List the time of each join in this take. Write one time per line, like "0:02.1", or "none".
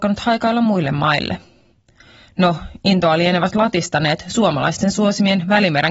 none